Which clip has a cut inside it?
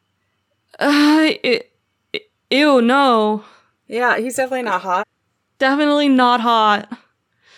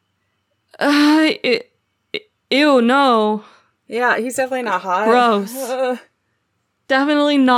first; 1 cut; at 5.0 s

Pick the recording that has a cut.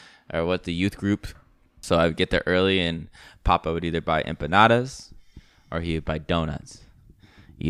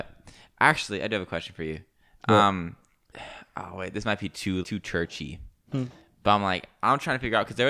second; 1 cut; at 4.6 s

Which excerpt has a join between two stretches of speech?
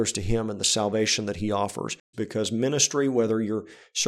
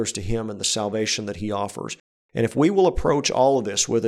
first; 1 cut; at 2.1 s

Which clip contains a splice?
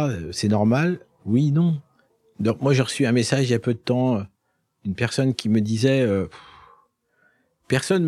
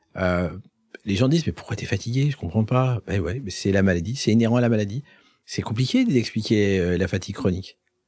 second; 1 cut; at 5.4 s

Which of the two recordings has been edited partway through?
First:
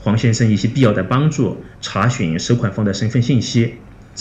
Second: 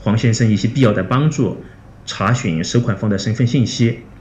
first; 1 cut; at 1.7 s

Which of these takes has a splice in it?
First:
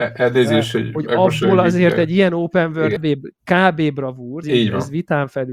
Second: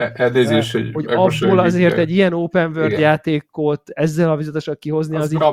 first; 2 cuts; at 3.0 s, 4.4 s

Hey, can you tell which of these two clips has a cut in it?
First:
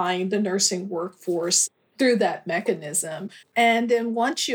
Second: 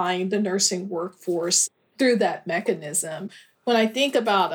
first; 1 cut; at 3.4 s

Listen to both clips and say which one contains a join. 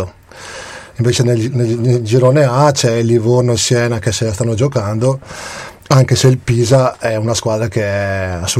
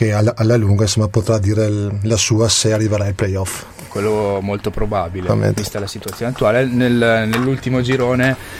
second; 1 cut; at 5.3 s

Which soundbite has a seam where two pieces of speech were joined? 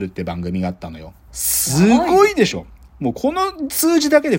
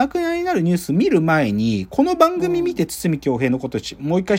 first; 1 cut; at 1.3 s

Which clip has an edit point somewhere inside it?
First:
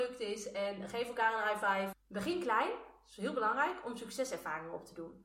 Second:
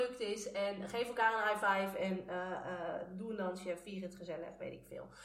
first; 1 cut; at 1.9 s

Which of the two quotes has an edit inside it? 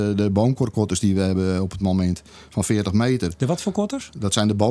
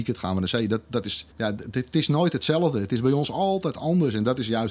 second; 1 cut; at 1.3 s

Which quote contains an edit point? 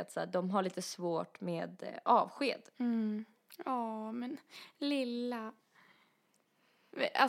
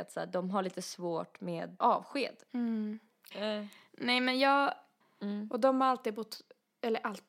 second; 3 cuts; at 1.8 s, 3.3 s, 5.0 s

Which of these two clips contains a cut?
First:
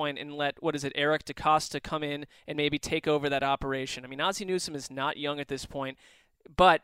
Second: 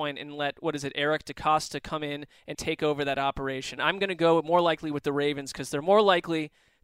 second; 2 cuts; at 2.5 s, 3.8 s

